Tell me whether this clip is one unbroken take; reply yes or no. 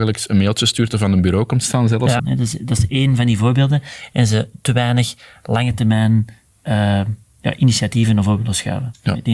no